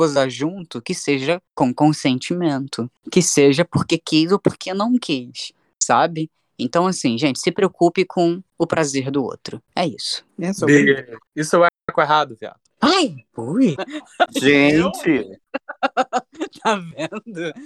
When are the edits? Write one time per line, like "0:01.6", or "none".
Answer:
0:12.7
0:13.8